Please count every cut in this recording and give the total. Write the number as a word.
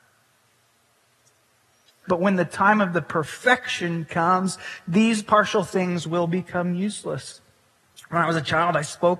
one